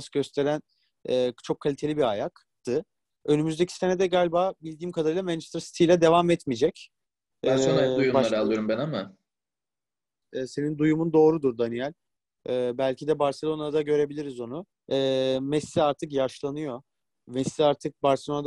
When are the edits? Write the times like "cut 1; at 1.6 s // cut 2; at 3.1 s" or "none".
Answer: cut 1; at 3.2 s // cut 2; at 10.2 s // cut 3; at 14.7 s